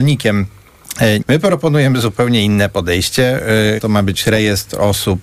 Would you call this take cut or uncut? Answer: cut